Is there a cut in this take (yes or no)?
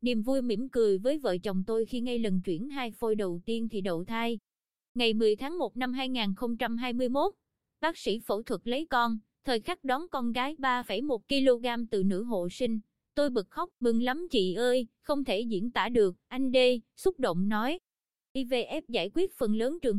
yes